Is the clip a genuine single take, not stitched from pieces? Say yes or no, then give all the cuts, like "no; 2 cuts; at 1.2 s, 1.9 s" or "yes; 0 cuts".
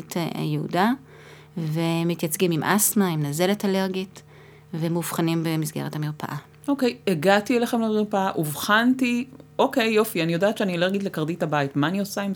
yes; 0 cuts